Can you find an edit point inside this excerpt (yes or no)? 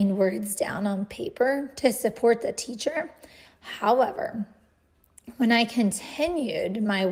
no